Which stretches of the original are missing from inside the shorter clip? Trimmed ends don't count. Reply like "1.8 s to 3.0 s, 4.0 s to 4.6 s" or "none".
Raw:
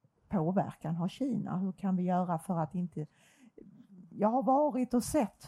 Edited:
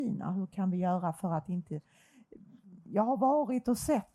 none